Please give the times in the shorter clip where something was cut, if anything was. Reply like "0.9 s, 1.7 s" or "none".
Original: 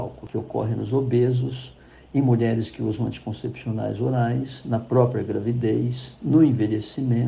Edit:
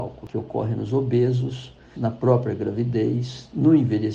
1.9 s